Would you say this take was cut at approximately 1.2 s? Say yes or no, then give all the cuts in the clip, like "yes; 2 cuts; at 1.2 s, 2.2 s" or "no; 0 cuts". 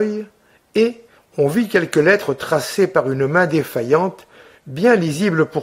yes; 1 cut; at 1.2 s